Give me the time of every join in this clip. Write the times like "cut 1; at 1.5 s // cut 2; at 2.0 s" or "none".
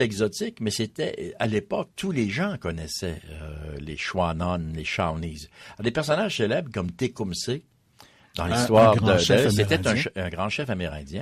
none

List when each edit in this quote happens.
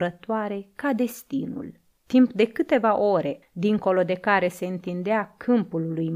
cut 1; at 2.0 s // cut 2; at 3.4 s

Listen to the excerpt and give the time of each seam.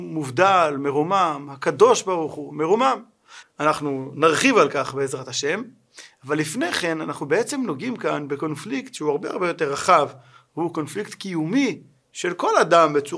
cut 1; at 3.4 s

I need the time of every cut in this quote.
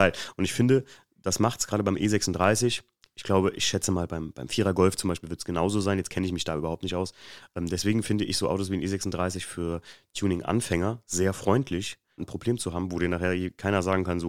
cut 1; at 12.2 s

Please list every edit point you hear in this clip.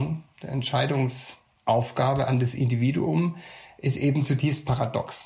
none

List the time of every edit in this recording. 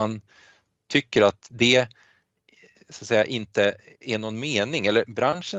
none

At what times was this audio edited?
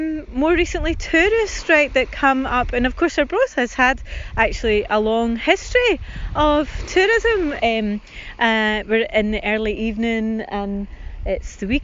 cut 1; at 7.6 s

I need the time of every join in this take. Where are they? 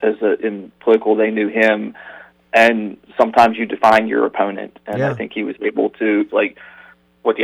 cut 1; at 6.3 s

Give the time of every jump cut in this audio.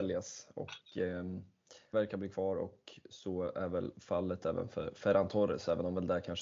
cut 1; at 1.9 s

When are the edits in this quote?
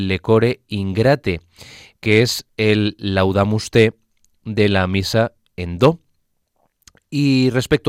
none

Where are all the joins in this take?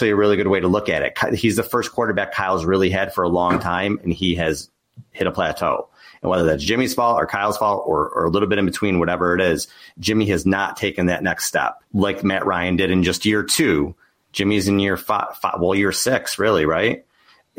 cut 1; at 11.9 s

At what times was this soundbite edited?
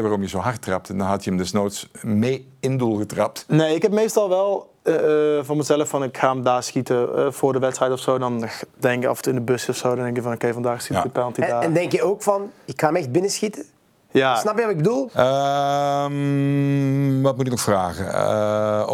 cut 1; at 15.1 s

